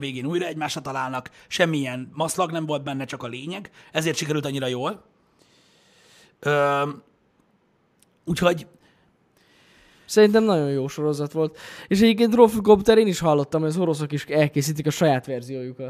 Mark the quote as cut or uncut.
uncut